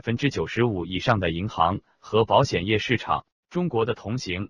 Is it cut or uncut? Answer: cut